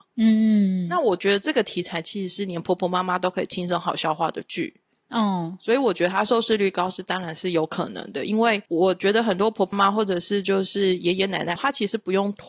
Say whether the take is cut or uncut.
cut